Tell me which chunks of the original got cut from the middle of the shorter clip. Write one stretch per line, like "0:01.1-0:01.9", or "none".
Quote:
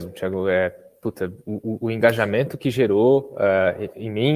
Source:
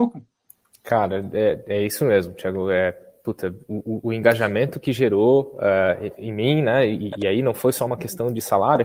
none